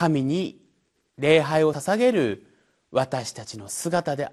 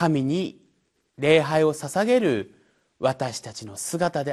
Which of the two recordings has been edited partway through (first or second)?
first